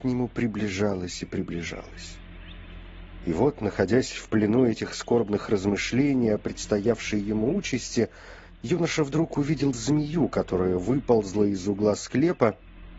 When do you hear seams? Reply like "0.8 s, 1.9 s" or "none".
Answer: none